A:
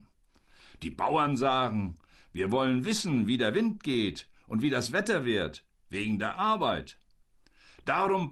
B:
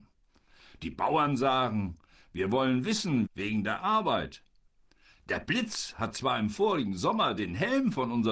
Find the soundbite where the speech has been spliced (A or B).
B